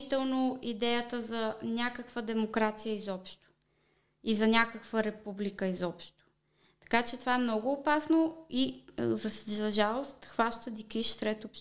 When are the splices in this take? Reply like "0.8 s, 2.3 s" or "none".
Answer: none